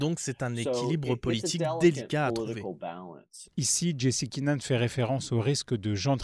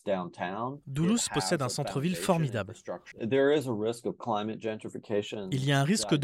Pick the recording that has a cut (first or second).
second